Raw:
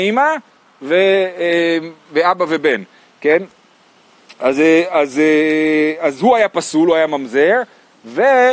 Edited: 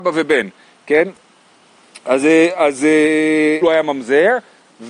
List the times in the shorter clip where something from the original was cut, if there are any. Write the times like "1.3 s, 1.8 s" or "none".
3.6 s